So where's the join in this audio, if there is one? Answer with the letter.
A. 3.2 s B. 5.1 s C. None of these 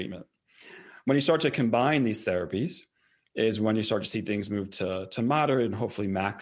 C